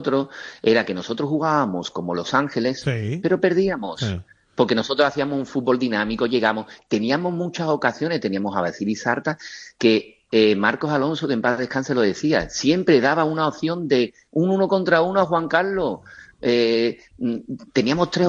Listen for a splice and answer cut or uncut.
uncut